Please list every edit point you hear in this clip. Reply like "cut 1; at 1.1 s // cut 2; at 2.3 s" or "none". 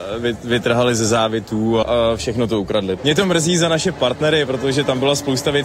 cut 1; at 1.8 s // cut 2; at 3.0 s